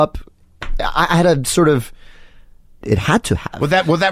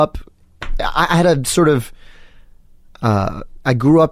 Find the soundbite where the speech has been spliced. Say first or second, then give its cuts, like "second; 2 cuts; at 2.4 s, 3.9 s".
first; 1 cut; at 2.8 s